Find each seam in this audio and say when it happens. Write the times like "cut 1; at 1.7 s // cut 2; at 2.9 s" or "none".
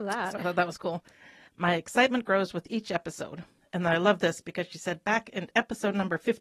cut 1; at 1.5 s